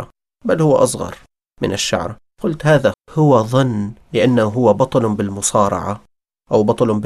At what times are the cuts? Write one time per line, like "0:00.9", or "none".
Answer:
0:02.9